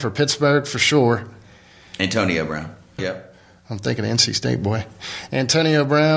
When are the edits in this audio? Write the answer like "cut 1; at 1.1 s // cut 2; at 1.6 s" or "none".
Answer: cut 1; at 3.0 s